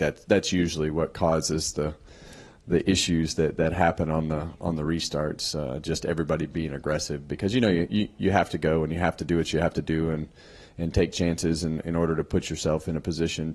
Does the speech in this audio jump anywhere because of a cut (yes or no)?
no